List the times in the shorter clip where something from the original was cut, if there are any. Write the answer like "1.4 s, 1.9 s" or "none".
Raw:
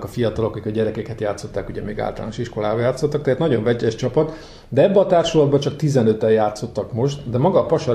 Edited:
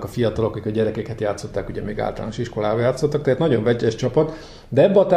none